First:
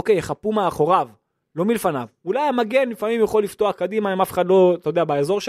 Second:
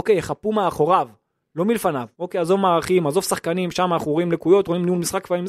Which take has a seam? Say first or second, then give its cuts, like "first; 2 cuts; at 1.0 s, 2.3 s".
second; 1 cut; at 2.1 s